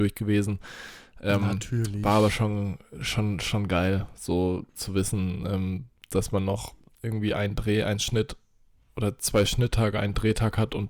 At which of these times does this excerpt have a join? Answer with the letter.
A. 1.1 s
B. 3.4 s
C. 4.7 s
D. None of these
C